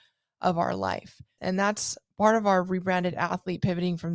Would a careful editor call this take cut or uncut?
cut